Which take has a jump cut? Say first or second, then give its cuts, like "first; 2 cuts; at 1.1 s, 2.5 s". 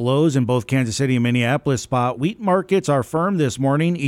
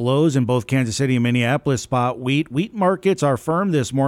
first; 1 cut; at 2.1 s